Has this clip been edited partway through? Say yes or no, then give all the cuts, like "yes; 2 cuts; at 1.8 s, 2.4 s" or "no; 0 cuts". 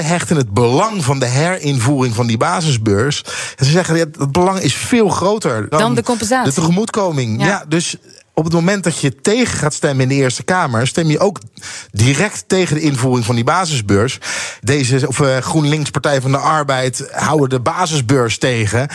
yes; 2 cuts; at 5.7 s, 14.6 s